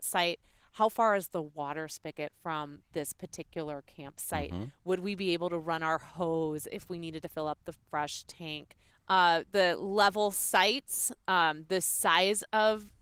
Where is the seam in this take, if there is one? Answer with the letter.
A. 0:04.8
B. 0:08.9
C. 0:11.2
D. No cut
B